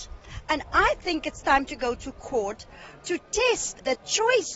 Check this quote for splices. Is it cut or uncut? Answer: uncut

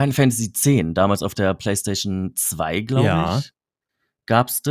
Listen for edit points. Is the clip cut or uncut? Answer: uncut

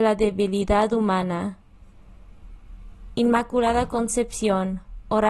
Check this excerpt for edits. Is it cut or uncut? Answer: uncut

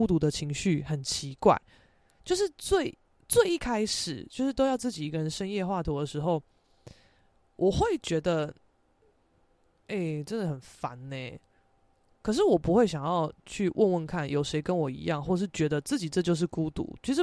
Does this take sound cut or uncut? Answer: uncut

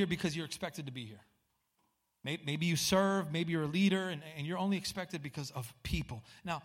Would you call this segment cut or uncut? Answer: uncut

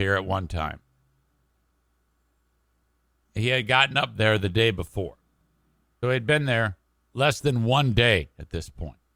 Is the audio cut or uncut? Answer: cut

